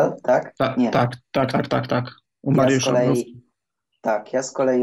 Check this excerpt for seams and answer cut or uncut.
uncut